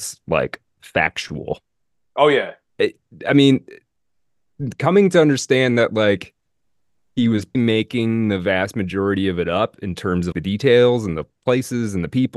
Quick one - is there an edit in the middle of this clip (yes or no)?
yes